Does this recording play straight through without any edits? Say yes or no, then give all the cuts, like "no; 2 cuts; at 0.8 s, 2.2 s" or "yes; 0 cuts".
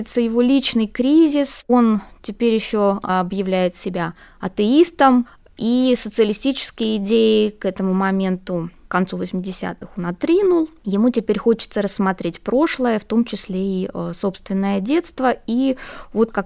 yes; 0 cuts